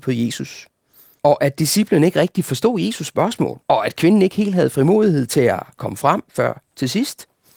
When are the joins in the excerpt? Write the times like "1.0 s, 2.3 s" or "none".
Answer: 1.2 s, 3.6 s